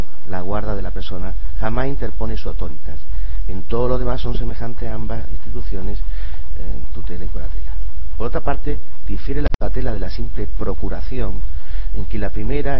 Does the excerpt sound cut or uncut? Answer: uncut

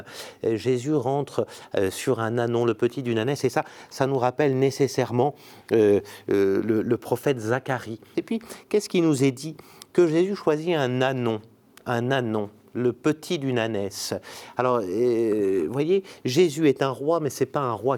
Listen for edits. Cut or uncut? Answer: cut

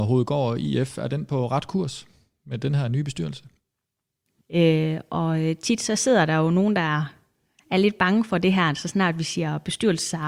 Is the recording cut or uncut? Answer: cut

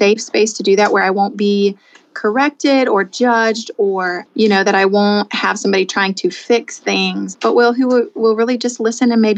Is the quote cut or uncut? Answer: cut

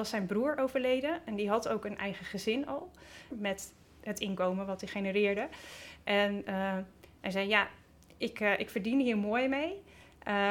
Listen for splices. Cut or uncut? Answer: cut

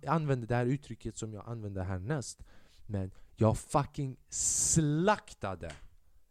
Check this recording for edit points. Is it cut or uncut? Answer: uncut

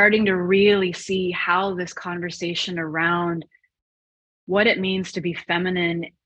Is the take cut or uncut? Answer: uncut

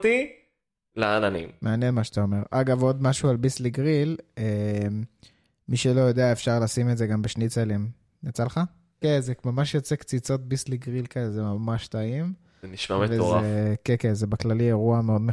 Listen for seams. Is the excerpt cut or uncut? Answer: cut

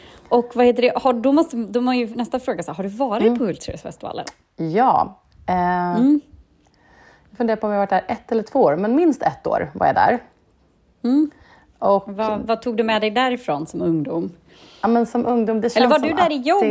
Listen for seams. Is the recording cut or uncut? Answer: uncut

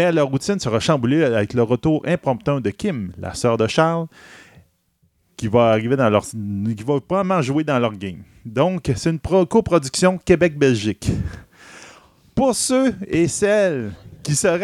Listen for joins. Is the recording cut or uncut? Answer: uncut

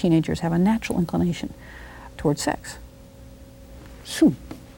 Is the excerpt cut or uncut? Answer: cut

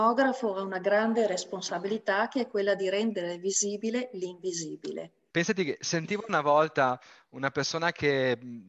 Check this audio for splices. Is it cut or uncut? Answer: cut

